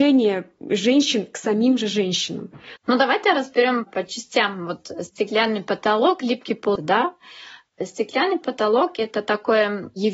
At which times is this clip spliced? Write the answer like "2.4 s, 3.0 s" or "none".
2.8 s, 6.8 s